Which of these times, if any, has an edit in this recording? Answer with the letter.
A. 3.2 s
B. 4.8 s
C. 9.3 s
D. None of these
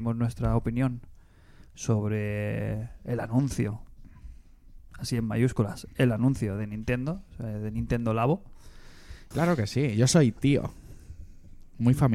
C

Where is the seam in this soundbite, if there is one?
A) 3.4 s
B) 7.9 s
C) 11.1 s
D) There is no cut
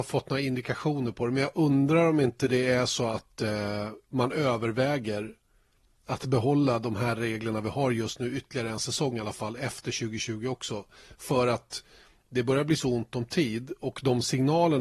D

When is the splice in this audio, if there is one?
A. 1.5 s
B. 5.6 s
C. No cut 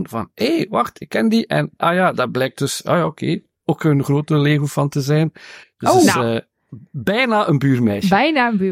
B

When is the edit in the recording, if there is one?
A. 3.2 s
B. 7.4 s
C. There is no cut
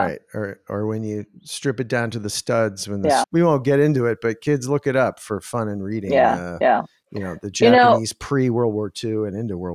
A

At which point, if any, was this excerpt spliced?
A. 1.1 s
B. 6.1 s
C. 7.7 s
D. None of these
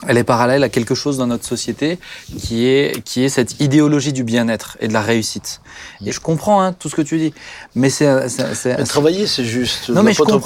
B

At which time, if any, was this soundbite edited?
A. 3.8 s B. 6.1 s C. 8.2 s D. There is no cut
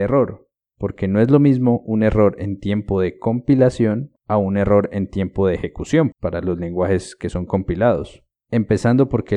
B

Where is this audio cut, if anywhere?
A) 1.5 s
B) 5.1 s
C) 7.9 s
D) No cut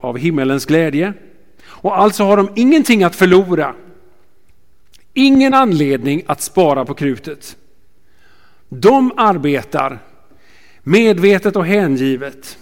D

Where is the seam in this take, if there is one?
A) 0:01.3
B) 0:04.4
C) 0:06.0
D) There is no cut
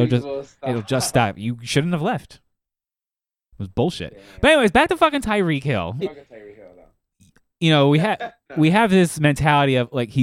C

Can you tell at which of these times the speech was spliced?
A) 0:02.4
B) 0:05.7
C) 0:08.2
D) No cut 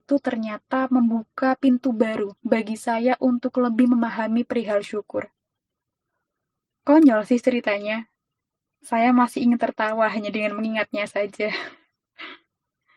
A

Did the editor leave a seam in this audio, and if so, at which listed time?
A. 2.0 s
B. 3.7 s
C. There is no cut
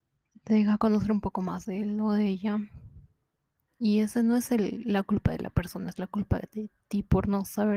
B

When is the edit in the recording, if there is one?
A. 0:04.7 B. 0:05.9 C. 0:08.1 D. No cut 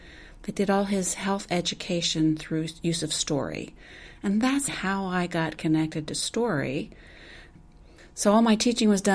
A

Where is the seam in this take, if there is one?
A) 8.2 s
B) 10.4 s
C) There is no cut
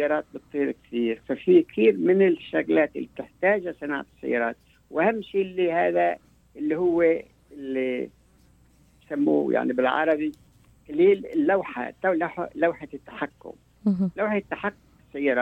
C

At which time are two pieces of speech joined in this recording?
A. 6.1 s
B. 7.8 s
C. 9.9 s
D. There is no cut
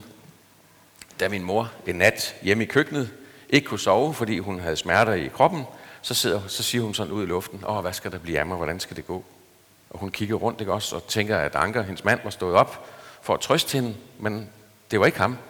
C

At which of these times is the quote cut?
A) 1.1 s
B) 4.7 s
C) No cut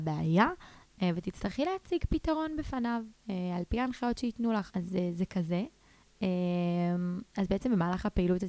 B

